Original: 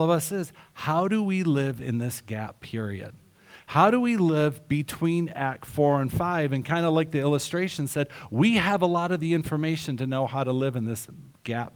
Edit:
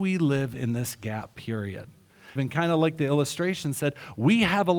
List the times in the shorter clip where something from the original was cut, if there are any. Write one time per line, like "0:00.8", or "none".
0:02.4